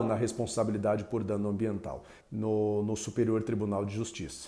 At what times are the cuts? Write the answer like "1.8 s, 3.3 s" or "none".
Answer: 2.2 s